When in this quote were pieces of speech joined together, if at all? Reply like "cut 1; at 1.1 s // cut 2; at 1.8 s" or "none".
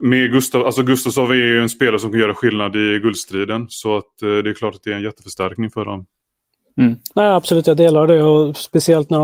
cut 1; at 7.1 s